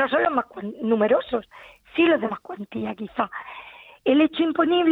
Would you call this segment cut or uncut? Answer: cut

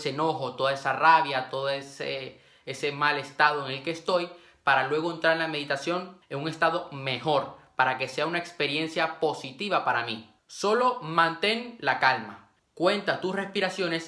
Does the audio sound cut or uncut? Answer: cut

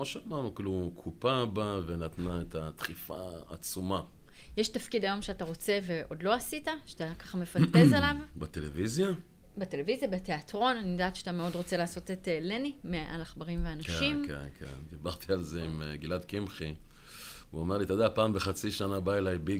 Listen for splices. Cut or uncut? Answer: uncut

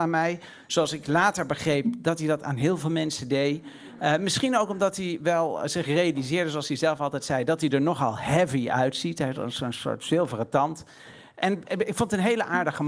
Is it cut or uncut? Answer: uncut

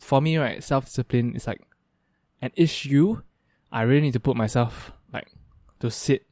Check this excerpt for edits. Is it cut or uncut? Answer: uncut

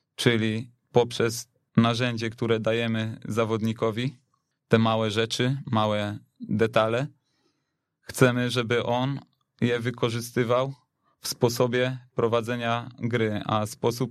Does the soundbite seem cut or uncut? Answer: uncut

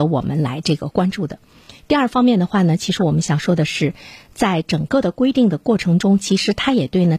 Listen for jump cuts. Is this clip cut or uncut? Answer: uncut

